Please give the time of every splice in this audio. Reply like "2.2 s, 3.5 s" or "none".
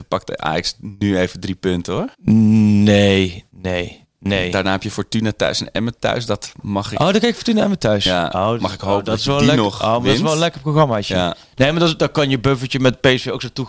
2.1 s